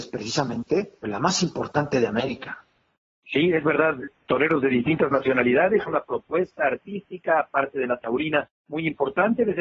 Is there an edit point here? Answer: yes; 2 cuts; at 1.0 s, 5.8 s

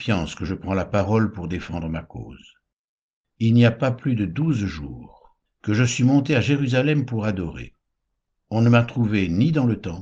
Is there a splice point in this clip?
yes; 1 cut; at 5.5 s

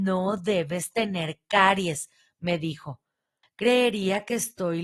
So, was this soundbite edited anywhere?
yes; 1 cut; at 3.4 s

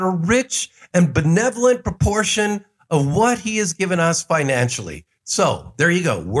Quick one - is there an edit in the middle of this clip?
no; 0 cuts

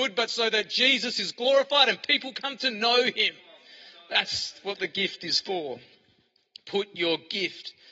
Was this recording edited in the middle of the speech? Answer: no; 0 cuts

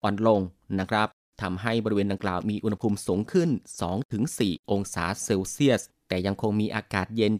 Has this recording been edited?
no; 0 cuts

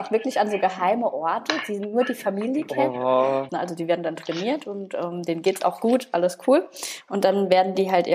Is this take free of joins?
no; 1 cut; at 3.5 s

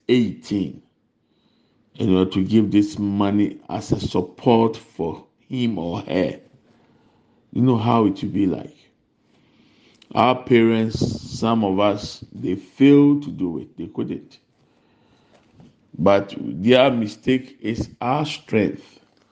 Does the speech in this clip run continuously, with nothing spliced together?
yes; 0 cuts

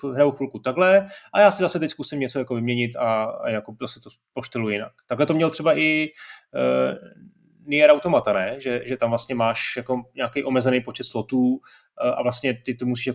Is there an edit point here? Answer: no; 0 cuts

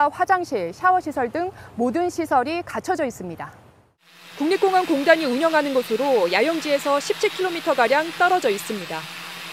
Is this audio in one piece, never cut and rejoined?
yes; 0 cuts

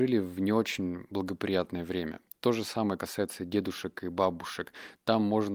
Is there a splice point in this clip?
no; 0 cuts

